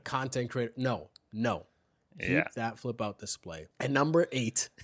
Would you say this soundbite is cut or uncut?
cut